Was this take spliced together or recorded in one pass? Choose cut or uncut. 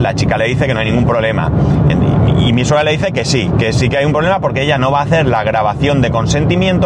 uncut